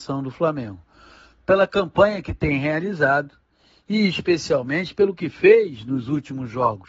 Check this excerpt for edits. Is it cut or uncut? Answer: uncut